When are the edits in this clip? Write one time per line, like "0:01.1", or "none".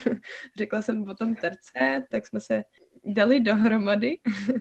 0:02.1